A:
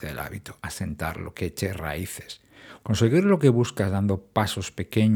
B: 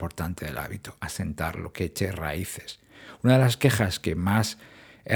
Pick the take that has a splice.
A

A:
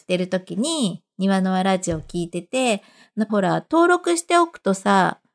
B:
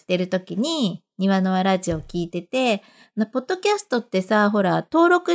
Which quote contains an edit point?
A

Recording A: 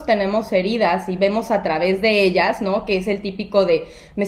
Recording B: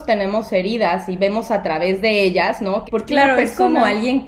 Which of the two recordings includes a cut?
B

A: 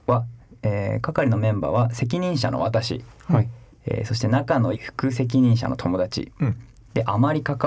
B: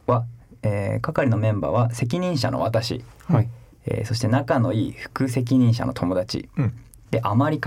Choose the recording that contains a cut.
A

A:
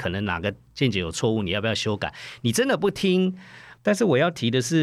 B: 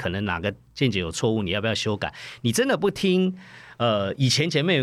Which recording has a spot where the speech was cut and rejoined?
A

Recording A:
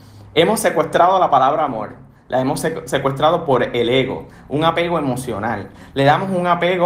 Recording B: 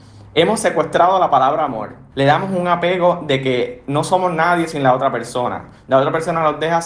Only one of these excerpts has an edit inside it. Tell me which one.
B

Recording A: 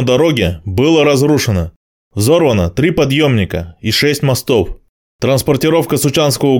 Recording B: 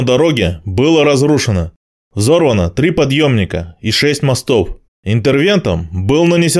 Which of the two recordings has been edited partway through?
B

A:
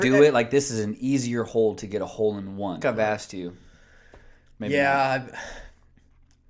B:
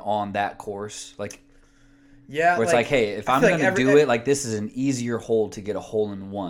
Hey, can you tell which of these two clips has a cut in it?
A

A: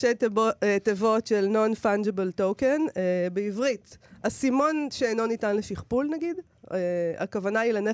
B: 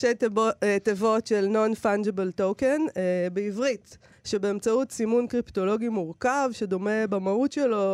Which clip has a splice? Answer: B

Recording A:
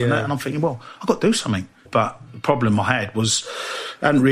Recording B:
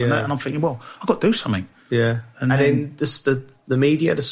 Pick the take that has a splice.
A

